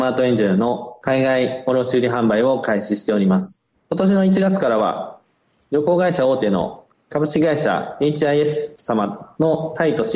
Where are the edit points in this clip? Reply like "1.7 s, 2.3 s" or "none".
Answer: 3.7 s